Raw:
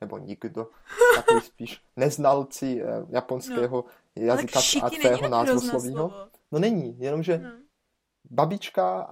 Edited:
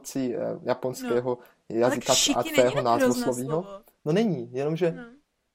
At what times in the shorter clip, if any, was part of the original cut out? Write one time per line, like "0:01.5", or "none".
none